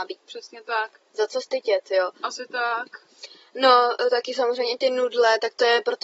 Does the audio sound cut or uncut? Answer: cut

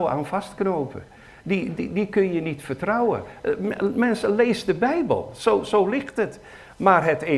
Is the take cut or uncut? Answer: uncut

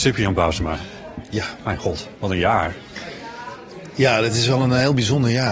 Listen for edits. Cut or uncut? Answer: uncut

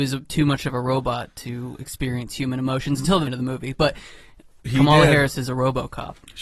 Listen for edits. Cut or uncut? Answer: cut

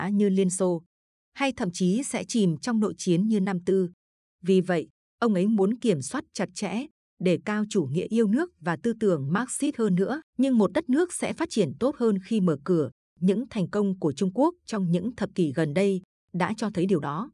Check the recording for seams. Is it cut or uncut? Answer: cut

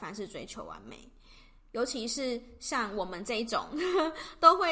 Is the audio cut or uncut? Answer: uncut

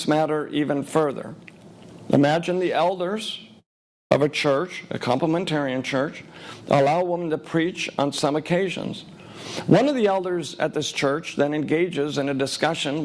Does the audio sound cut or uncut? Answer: uncut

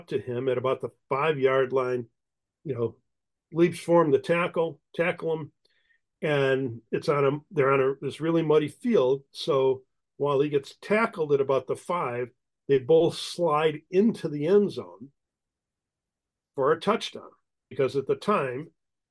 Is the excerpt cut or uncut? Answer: uncut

